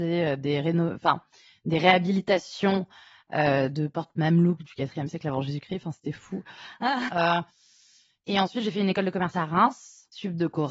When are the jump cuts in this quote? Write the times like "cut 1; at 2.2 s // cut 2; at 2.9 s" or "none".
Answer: cut 1; at 7.1 s